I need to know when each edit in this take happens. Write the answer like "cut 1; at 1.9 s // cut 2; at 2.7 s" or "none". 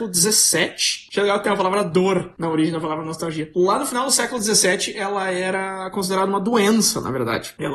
cut 1; at 1.1 s